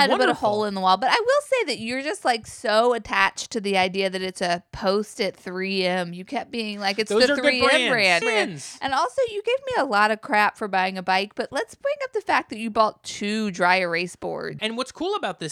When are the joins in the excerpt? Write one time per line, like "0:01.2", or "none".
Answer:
0:08.2
0:14.6